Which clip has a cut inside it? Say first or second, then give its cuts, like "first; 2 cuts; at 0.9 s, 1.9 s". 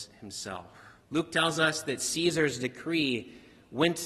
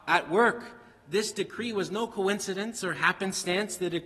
first; 1 cut; at 1.0 s